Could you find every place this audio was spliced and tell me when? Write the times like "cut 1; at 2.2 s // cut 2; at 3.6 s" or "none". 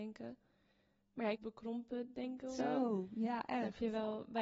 cut 1; at 1.3 s // cut 2; at 2.6 s